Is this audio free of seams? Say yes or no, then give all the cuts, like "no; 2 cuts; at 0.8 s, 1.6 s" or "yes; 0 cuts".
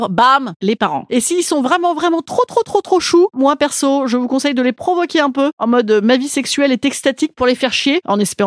no; 1 cut; at 1.1 s